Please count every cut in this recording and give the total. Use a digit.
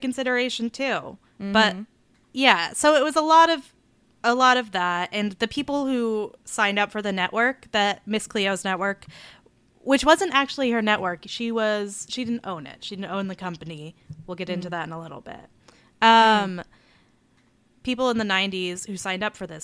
0